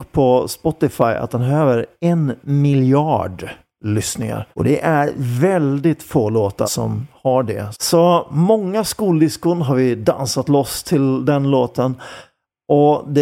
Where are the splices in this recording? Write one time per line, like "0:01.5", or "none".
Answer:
0:04.5
0:06.6
0:07.7